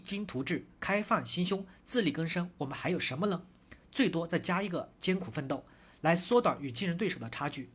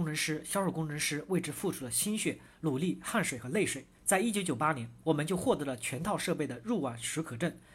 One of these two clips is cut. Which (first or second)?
second